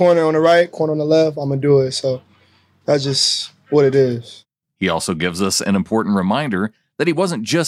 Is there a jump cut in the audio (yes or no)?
no